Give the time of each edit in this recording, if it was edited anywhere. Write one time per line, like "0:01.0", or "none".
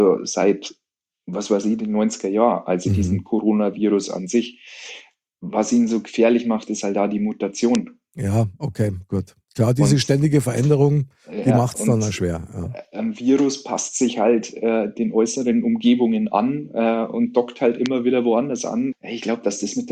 0:09.4
0:18.9

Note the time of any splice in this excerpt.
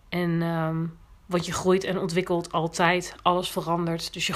0:01.2

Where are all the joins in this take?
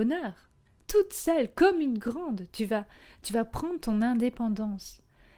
none

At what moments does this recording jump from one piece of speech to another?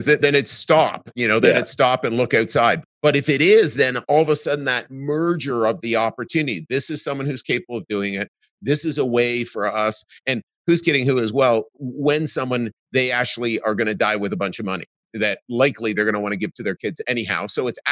0:12.8

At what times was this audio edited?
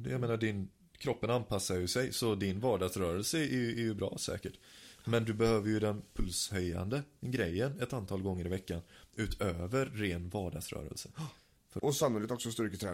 0:11.8

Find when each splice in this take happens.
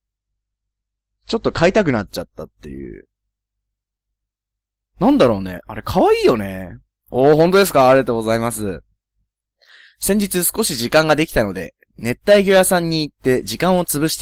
0:07.0

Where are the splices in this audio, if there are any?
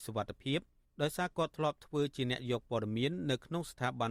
none

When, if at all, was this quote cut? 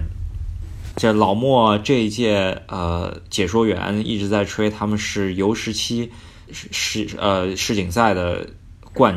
0:00.9

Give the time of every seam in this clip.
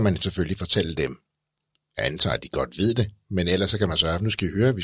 none

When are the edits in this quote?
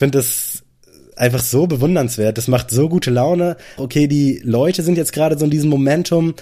0:03.8

